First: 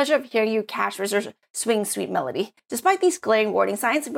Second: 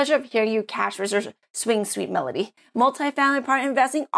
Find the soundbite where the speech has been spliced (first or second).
first